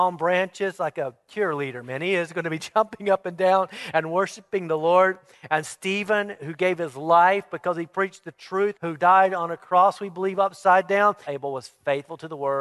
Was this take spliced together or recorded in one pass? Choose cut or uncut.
cut